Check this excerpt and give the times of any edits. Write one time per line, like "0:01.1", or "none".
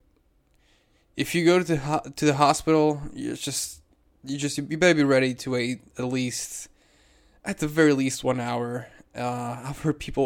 none